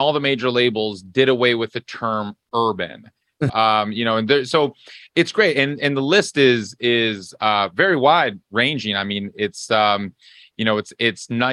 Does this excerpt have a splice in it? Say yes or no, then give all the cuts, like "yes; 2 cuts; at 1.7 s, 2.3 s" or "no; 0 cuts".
yes; 1 cut; at 3.5 s